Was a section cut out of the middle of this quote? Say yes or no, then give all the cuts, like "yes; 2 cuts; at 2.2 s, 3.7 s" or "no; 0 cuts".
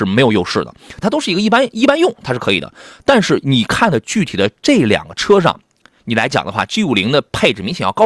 yes; 1 cut; at 1.0 s